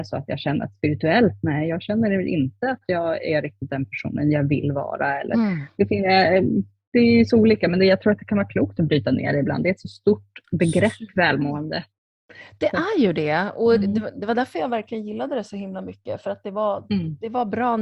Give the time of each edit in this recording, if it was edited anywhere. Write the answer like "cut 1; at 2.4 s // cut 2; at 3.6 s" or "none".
none